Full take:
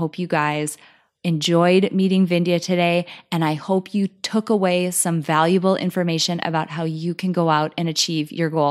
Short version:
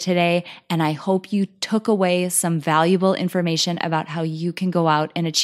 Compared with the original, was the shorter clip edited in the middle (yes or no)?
no